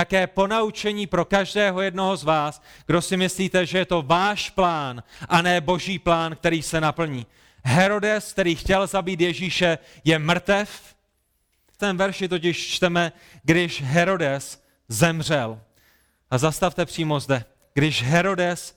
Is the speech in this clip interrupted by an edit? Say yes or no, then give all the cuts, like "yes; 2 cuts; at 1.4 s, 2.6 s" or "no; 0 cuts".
yes; 1 cut; at 11.8 s